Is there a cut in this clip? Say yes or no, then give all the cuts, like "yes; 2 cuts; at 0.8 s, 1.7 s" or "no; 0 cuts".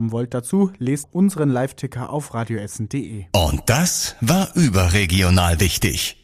yes; 1 cut; at 1.0 s